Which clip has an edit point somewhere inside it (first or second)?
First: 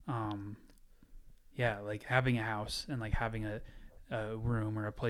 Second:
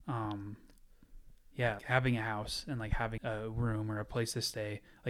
second